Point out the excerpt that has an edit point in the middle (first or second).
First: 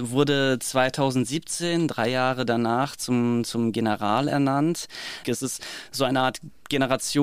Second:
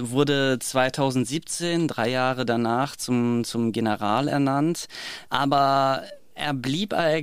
first